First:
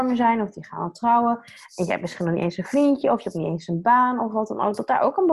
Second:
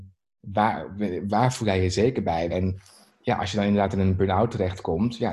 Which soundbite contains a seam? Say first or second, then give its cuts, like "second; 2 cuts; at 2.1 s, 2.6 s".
second; 1 cut; at 2.5 s